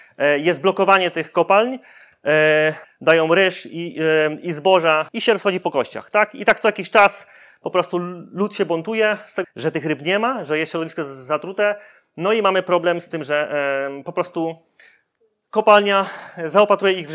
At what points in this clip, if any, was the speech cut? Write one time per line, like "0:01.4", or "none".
0:02.8
0:09.4